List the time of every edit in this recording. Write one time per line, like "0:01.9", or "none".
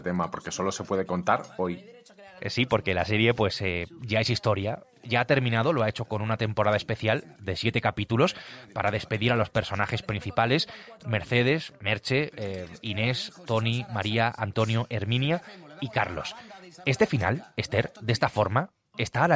none